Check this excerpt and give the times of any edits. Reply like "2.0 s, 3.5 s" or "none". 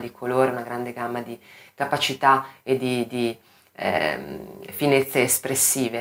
none